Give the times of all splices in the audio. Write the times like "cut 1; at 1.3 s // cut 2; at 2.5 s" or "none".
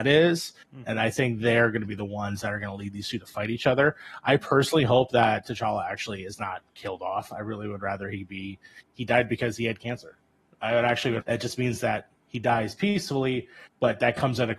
cut 1; at 11.2 s